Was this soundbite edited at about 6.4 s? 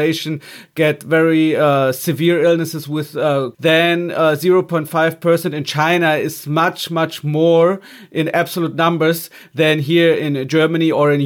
no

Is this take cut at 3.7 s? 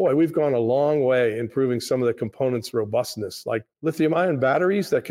yes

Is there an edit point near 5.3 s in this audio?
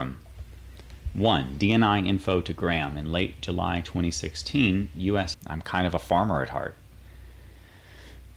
yes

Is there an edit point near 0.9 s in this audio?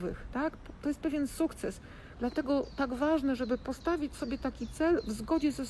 no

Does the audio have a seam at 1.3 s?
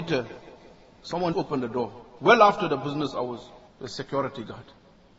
yes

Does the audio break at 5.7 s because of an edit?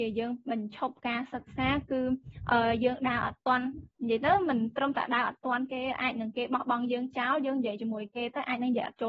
no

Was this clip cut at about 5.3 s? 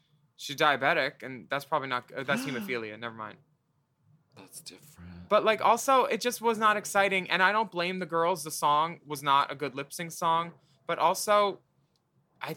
no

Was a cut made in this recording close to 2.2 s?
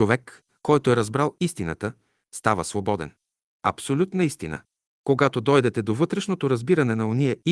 no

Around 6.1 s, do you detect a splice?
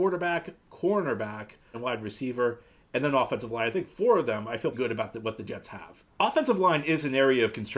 no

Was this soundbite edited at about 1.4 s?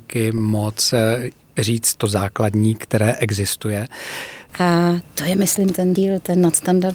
no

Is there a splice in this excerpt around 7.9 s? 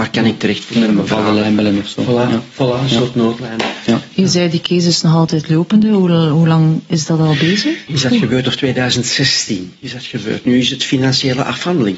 yes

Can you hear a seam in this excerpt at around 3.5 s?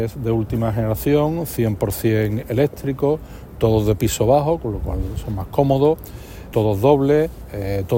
no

